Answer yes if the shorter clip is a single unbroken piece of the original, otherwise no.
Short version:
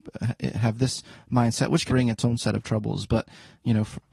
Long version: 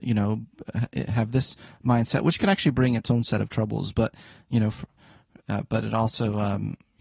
no